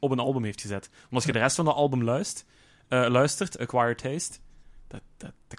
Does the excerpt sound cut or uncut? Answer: cut